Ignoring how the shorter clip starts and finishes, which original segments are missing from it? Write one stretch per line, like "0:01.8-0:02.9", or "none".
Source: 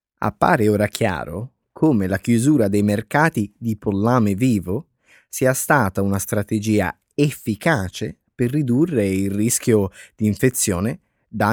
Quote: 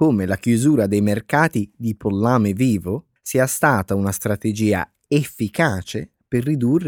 0:05.0-0:05.2